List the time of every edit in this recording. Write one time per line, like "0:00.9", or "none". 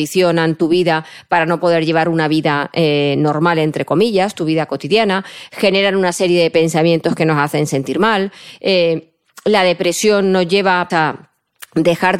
0:10.9